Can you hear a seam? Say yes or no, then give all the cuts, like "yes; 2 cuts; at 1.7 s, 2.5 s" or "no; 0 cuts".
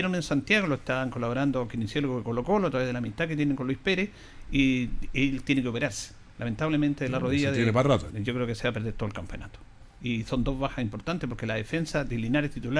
yes; 1 cut; at 8.1 s